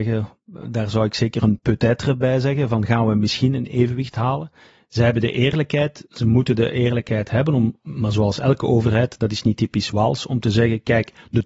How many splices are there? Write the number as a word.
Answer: zero